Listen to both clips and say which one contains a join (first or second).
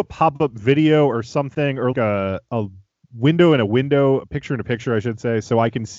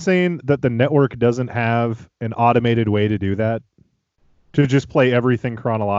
first